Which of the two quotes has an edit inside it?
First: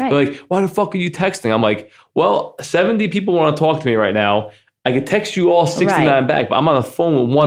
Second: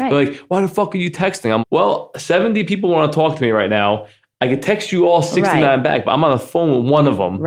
second; 1 cut; at 1.6 s

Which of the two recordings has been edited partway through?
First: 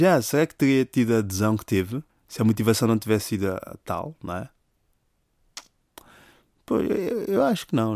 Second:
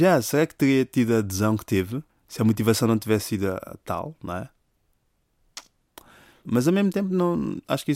second; 1 cut; at 6.4 s

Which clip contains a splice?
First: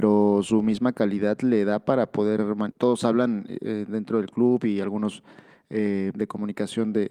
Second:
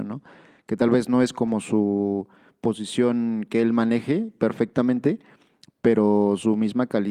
first; 2 cuts; at 2.7 s, 6.1 s

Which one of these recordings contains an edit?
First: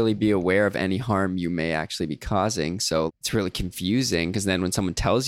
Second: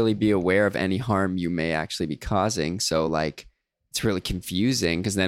first; 1 cut; at 3.1 s

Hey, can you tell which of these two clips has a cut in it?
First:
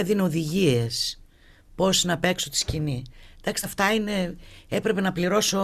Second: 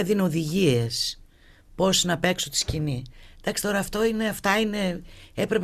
first; 1 cut; at 3.6 s

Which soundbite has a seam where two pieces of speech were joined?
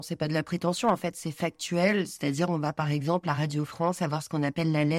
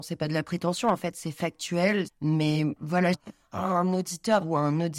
second; 2 cuts; at 2.1 s, 3.1 s

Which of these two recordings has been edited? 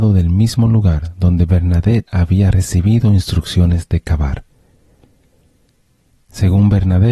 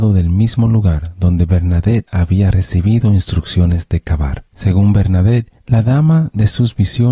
second; 2 cuts; at 4.5 s, 5.6 s

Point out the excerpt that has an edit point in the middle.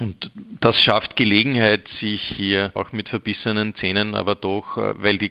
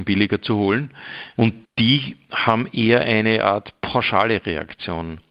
second; 1 cut; at 1.3 s

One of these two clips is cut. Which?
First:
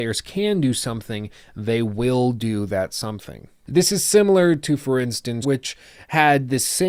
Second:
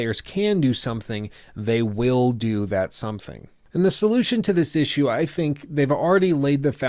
first; 2 cuts; at 3.6 s, 5.4 s

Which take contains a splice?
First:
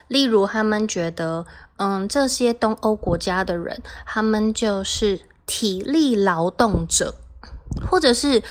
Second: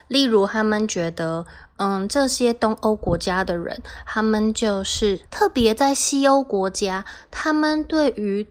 second; 1 cut; at 5.3 s

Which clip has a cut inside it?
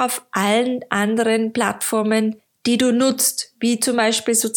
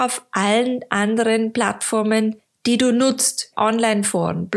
second; 1 cut; at 3.5 s

